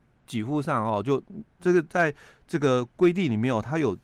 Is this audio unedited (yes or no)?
no